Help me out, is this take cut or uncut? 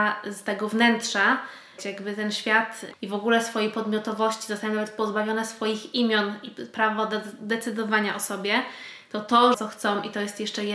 cut